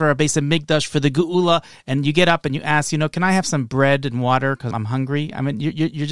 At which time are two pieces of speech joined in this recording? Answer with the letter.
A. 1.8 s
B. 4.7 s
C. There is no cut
B